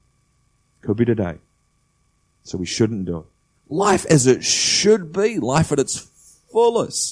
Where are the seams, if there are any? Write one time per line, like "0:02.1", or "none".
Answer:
0:03.5